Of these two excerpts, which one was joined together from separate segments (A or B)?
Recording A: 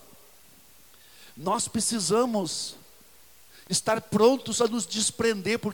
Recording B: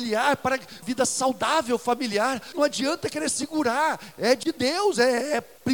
B